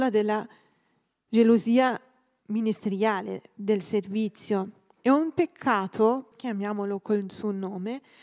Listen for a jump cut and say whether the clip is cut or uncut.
cut